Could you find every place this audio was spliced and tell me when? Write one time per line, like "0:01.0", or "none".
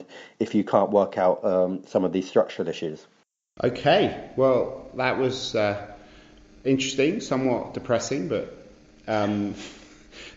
none